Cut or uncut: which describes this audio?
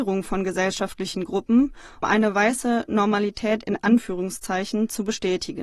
cut